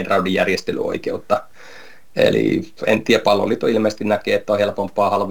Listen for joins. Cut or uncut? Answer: uncut